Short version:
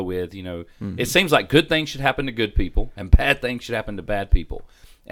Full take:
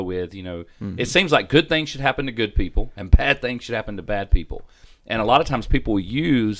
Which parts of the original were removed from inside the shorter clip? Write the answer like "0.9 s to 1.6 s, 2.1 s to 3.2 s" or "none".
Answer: none